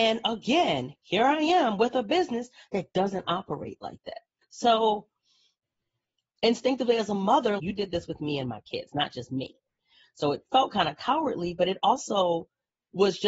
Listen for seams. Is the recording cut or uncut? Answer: cut